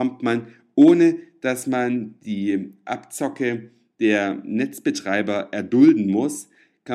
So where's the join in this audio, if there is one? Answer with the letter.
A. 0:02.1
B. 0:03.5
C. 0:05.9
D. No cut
D